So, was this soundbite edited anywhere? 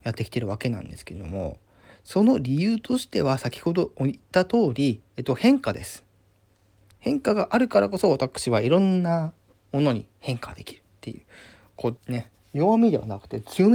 yes; 2 cuts; at 6.9 s, 12.0 s

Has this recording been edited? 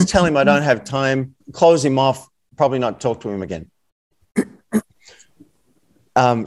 yes; 2 cuts; at 1.4 s, 4.9 s

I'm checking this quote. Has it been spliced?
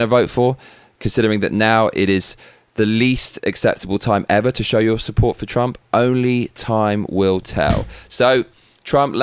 no; 0 cuts

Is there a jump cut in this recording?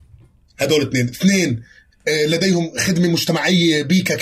no; 0 cuts

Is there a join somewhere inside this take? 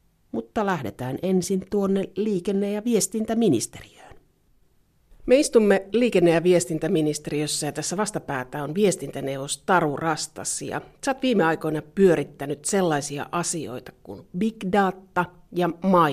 no; 0 cuts

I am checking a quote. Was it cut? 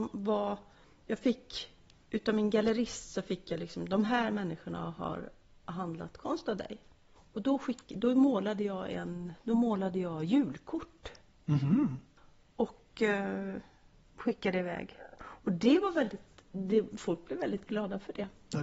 no; 0 cuts

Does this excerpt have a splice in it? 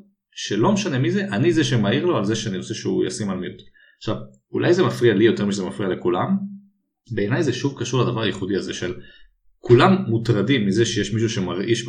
no; 0 cuts

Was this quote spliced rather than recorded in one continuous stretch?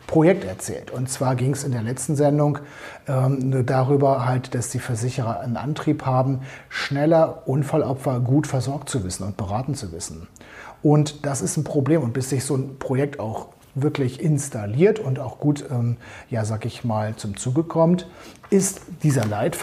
no; 0 cuts

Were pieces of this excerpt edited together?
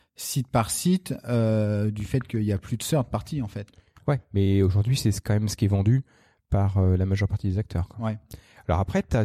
no; 0 cuts

